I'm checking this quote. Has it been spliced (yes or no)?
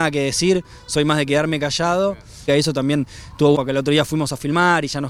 yes